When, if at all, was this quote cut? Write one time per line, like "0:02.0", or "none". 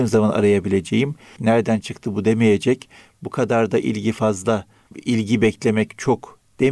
0:01.4
0:04.9